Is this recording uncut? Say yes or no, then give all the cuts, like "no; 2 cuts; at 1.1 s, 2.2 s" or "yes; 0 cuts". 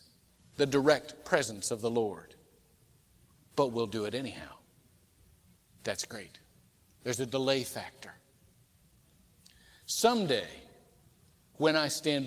yes; 0 cuts